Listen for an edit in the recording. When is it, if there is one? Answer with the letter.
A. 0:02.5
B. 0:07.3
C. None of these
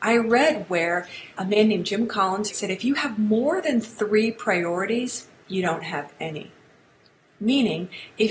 A